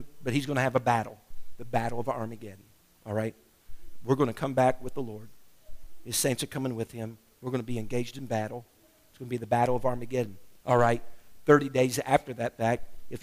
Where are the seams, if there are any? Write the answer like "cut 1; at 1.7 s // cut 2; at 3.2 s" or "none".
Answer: cut 1; at 10.6 s